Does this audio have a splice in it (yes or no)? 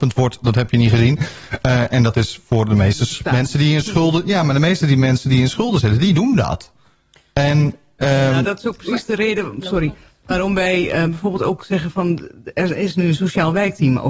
no